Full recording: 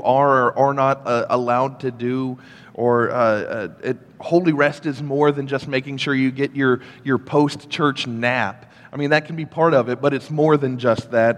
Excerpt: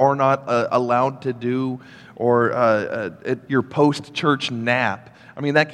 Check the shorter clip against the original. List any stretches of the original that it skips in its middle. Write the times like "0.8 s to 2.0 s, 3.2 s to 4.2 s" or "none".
4.0 s to 7.0 s